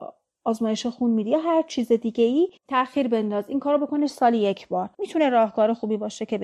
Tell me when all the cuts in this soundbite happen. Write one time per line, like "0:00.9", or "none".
0:02.6
0:04.9